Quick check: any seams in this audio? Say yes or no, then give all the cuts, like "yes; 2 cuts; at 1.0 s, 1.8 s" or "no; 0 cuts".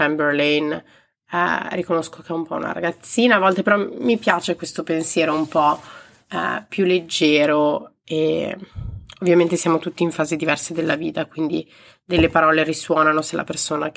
no; 0 cuts